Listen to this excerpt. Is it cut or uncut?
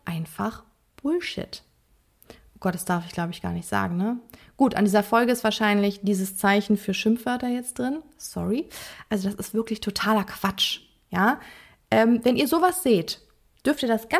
uncut